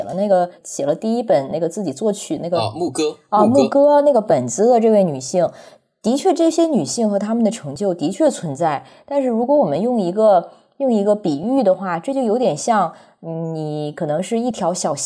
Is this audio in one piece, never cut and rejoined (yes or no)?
yes